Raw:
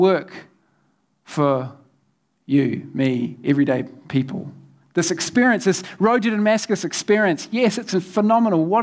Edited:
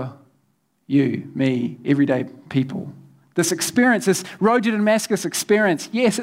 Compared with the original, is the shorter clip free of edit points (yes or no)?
yes